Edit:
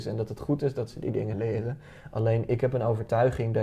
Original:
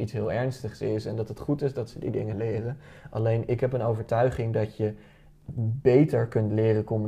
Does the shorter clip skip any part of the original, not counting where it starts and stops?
no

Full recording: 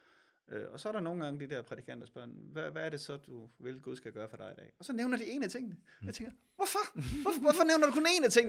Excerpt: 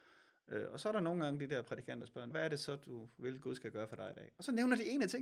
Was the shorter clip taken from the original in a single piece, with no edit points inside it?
no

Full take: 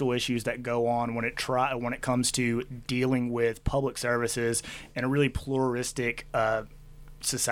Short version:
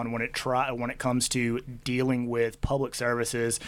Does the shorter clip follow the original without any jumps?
yes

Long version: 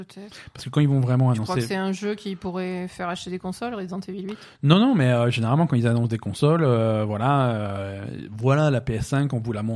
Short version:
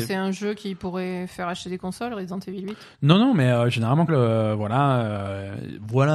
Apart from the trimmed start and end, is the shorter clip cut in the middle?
yes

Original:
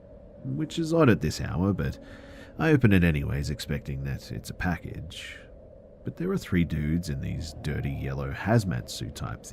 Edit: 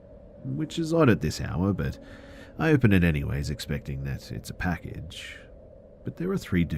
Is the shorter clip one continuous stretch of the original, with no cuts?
yes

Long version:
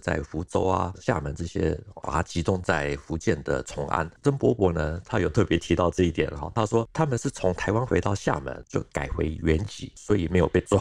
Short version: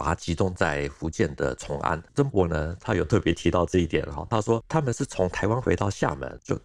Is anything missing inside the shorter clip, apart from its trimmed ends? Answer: yes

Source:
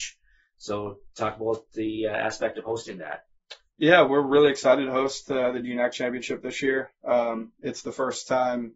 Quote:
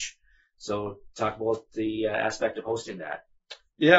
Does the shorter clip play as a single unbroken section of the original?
yes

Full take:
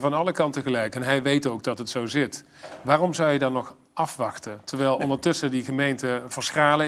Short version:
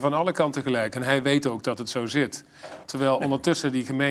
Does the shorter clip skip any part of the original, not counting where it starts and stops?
yes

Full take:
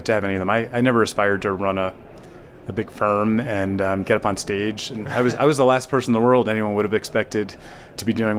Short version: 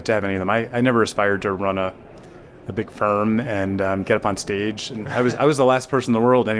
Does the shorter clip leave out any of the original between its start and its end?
no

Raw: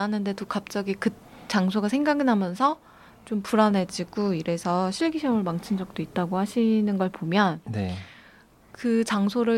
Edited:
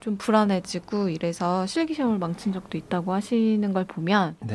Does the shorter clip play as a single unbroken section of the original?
yes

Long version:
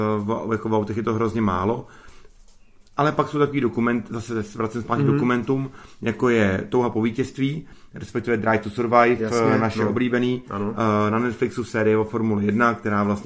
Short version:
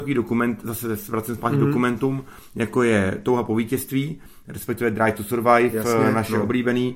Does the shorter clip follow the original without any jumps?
yes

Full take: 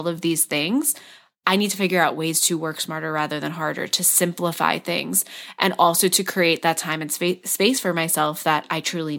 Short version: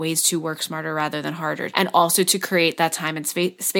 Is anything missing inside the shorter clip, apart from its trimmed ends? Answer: yes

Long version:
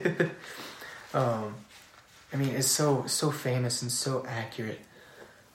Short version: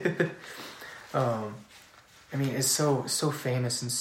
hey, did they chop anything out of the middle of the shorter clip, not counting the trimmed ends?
no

